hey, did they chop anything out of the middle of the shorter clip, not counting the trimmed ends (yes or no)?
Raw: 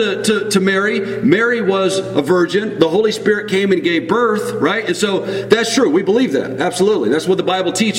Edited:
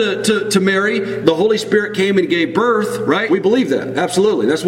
yes